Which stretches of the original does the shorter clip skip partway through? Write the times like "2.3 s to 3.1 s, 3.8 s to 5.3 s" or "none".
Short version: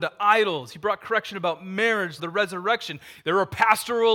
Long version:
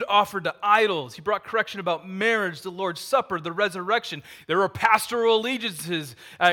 2.6 s to 3.4 s